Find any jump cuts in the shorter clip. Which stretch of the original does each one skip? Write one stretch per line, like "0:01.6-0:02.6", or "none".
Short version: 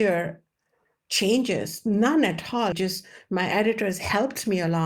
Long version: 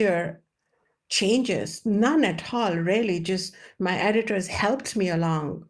0:02.7-0:03.2